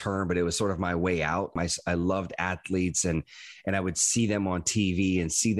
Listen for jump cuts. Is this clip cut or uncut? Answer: cut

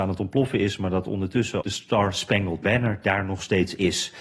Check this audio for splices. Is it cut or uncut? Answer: cut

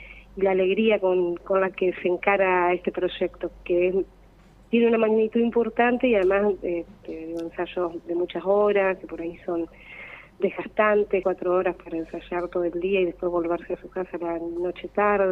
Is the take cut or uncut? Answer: cut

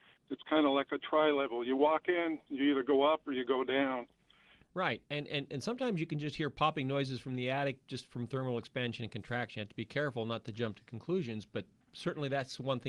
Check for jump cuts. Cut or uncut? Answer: cut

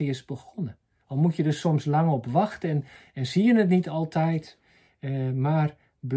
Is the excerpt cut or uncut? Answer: uncut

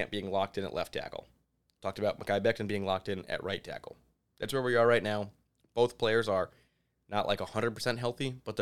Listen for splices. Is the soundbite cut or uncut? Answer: uncut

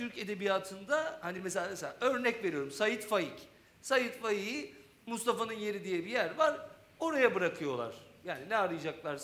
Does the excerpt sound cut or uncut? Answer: uncut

